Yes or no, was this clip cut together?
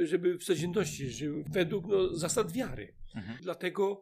no